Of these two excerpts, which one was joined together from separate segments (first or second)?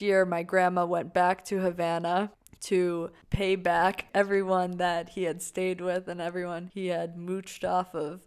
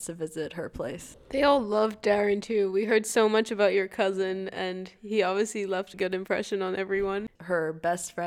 second